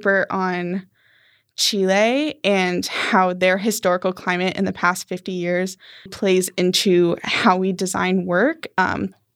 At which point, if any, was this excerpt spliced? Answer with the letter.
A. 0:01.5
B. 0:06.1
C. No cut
B